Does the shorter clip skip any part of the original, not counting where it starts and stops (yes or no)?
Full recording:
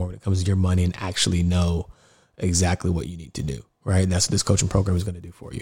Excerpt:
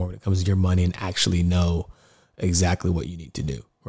no